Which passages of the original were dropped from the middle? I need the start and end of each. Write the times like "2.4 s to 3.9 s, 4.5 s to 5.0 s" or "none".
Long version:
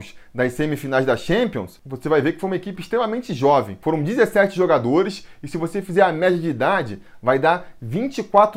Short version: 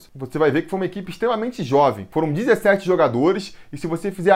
none